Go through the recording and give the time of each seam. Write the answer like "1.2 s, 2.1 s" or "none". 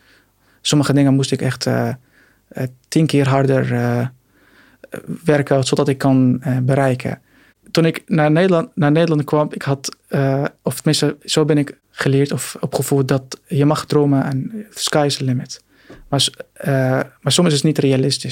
none